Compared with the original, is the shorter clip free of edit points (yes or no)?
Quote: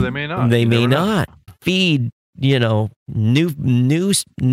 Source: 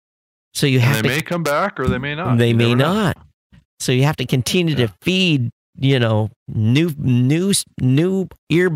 no